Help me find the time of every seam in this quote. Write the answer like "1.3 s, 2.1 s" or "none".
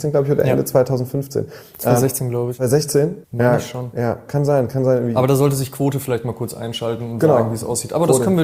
3.2 s